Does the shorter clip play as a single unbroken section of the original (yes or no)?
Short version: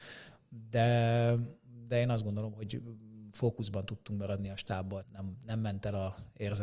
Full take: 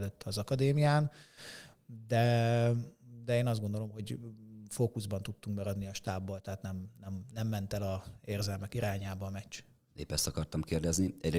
no